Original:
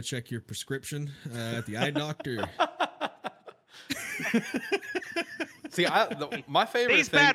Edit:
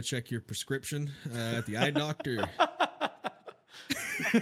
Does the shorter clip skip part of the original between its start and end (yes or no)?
no